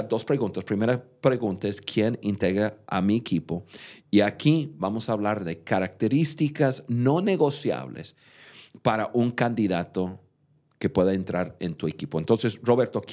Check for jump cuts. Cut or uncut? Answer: uncut